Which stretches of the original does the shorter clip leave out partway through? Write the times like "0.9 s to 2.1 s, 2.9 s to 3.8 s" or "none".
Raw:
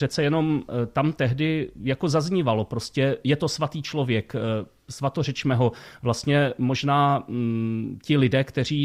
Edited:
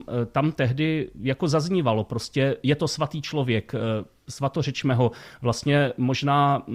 none